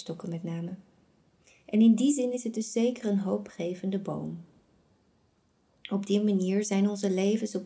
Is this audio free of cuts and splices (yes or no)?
yes